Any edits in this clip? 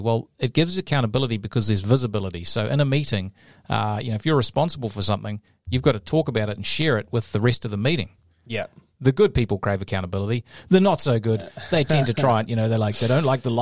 yes; 1 cut; at 8.9 s

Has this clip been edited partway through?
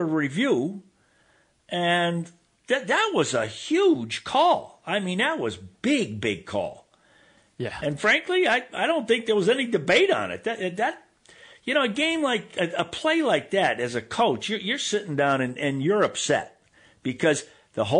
no; 0 cuts

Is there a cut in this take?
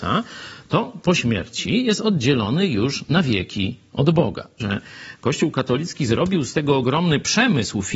yes; 1 cut; at 4.6 s

